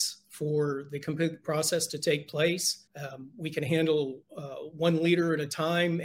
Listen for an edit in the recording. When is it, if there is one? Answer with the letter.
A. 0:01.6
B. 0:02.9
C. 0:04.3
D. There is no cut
B